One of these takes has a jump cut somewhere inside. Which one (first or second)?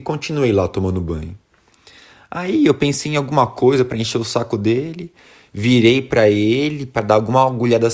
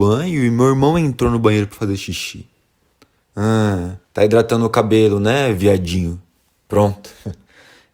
second